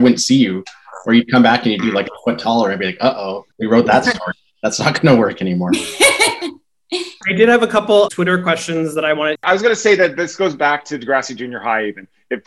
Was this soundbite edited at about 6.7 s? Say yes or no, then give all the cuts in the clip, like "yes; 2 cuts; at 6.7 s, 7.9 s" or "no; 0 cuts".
no; 3 cuts; at 3.5 s, 8.1 s, 9.4 s